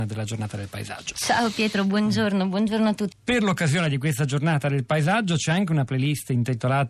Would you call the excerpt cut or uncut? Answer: cut